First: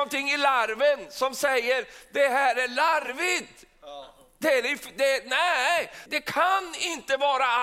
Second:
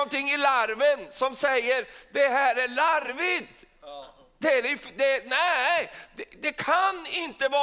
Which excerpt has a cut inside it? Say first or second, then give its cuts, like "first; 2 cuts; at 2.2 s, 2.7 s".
first; 1 cut; at 6.1 s